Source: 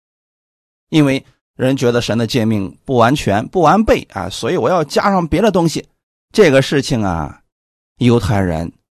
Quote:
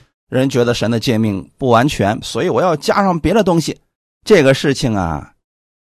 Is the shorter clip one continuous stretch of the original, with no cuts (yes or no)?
no